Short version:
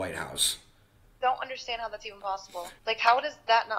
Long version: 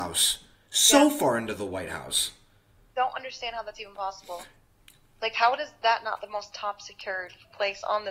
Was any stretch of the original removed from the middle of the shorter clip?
yes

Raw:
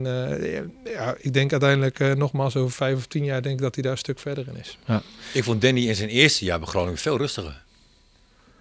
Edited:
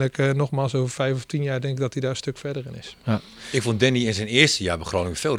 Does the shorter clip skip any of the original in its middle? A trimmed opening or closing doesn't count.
no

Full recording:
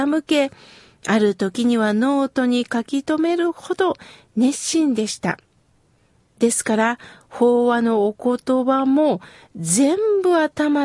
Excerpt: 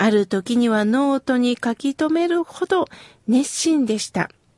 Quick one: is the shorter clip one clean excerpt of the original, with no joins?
yes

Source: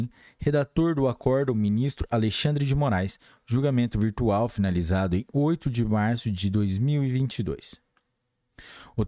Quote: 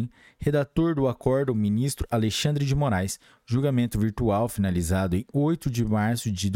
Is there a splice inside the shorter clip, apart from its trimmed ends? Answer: no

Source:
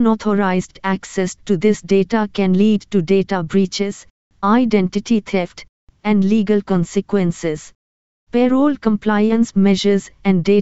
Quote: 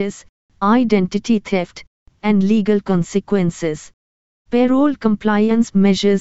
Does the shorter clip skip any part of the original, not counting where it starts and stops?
no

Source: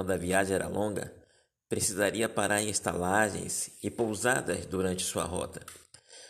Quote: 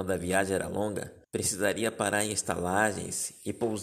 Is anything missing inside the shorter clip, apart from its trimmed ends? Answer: yes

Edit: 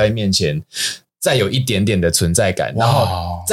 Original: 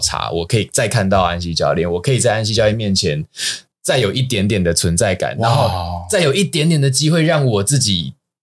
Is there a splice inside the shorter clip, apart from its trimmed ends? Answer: no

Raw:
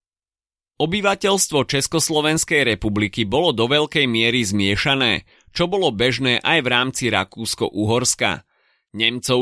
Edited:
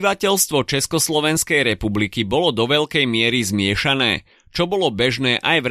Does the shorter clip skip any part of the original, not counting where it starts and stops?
no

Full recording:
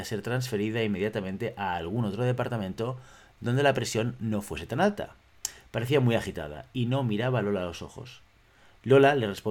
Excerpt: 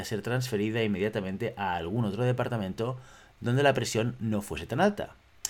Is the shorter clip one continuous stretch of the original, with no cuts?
yes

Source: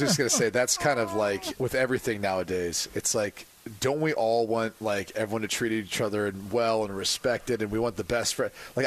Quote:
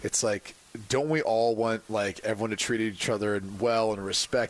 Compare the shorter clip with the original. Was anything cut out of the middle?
no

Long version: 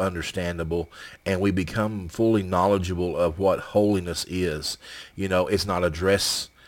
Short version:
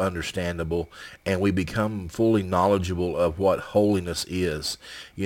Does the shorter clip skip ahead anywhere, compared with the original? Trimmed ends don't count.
no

